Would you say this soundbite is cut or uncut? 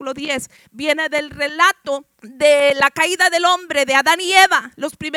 cut